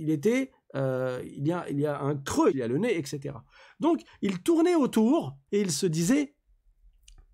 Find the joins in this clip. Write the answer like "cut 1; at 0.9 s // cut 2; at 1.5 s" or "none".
cut 1; at 2.5 s // cut 2; at 5.5 s